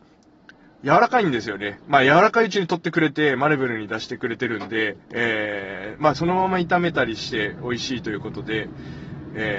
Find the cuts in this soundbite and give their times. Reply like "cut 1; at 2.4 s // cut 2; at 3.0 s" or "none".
cut 1; at 5.0 s // cut 2; at 6.1 s